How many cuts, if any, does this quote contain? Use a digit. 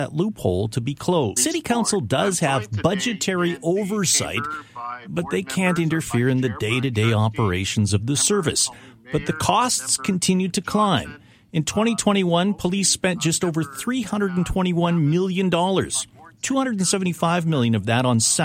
1